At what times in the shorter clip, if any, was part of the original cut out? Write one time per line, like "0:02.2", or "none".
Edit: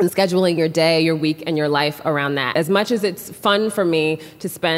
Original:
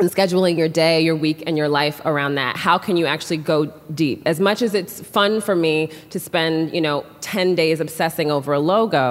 0:02.5

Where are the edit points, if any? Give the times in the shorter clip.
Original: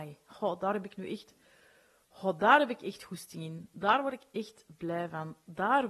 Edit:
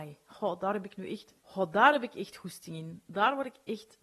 0:01.4

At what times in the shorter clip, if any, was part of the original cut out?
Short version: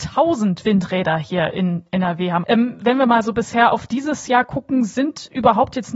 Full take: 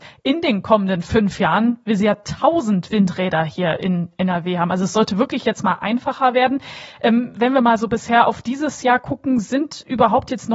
0:02.4

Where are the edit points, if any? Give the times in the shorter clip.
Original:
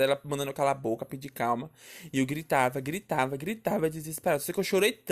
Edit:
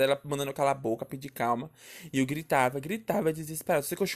0:02.7

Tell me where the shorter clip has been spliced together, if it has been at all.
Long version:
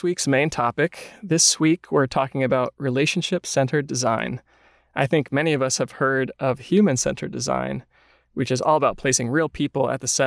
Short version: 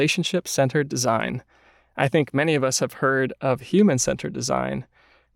none

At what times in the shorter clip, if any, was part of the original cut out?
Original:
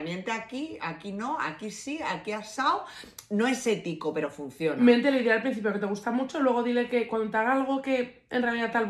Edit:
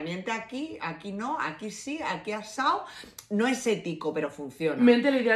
none

